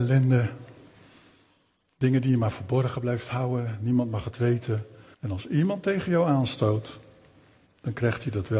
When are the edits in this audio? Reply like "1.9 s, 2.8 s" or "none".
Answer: 5.1 s

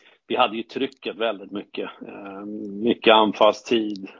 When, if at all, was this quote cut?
none

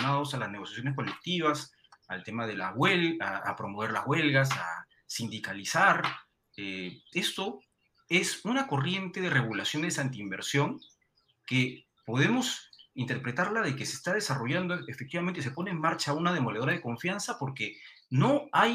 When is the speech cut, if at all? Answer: 7.1 s

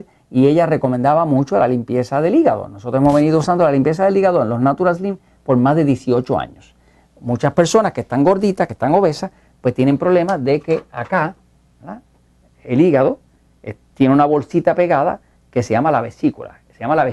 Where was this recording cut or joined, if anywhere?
none

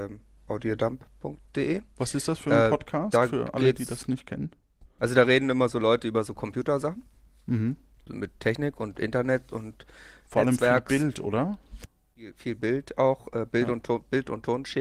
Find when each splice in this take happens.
none

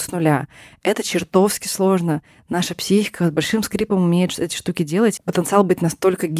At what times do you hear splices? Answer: 5.2 s

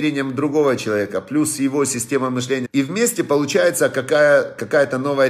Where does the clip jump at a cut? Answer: 2.6 s

